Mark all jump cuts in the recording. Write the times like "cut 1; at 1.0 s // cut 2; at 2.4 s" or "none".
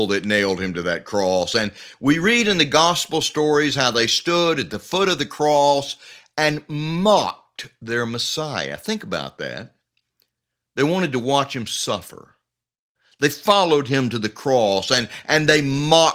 none